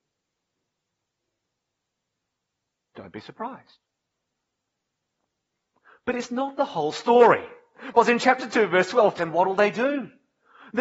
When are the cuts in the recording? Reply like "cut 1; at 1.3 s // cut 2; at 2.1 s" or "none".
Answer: cut 1; at 9.2 s